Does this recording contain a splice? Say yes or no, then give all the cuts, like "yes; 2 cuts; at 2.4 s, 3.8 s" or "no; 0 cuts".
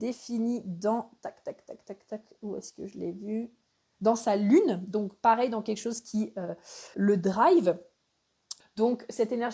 yes; 2 cuts; at 6.9 s, 8.6 s